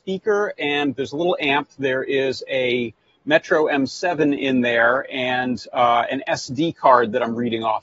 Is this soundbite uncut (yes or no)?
yes